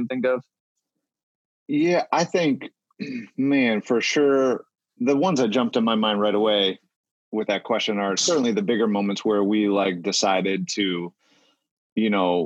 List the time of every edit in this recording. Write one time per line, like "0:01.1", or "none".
none